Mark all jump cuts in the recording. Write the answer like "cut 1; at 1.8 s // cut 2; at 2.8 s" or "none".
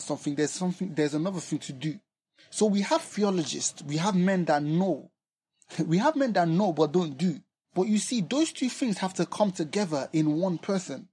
cut 1; at 7.6 s